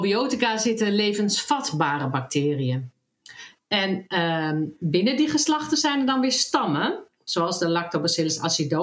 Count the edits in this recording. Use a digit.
1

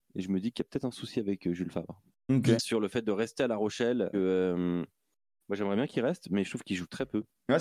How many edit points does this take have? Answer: 2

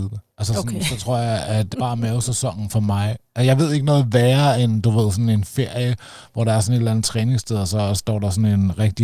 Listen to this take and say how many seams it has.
1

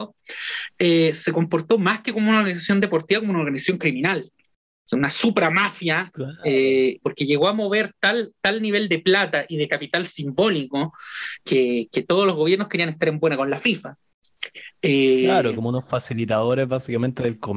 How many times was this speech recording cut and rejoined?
2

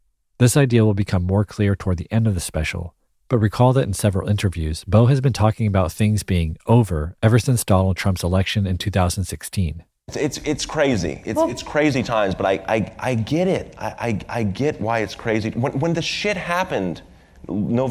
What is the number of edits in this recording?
0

